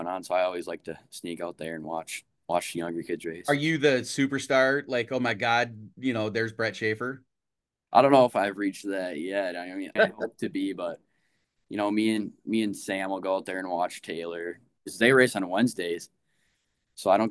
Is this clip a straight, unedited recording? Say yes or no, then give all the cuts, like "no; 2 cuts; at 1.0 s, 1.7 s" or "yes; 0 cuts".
no; 2 cuts; at 10.0 s, 14.8 s